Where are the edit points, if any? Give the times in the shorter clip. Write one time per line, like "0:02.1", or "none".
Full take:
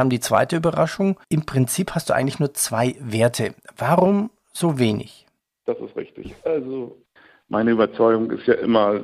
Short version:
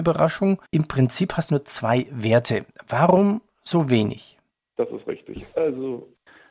0:01.5